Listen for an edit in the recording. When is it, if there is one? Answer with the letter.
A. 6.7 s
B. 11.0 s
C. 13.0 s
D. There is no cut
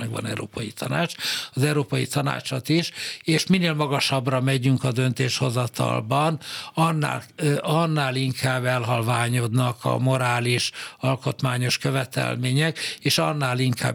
D